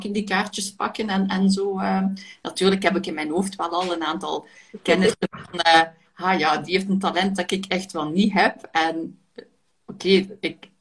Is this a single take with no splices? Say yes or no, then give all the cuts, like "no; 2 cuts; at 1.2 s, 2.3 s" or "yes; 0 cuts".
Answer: yes; 0 cuts